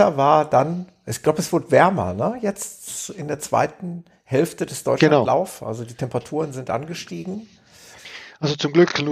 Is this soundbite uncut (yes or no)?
yes